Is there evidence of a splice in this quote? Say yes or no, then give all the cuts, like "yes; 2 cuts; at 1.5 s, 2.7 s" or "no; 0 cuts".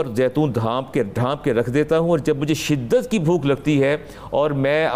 no; 0 cuts